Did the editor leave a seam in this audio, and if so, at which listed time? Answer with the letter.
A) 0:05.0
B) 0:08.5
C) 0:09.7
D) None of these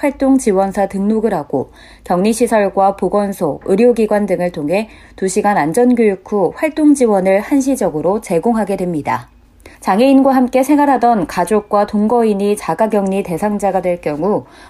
C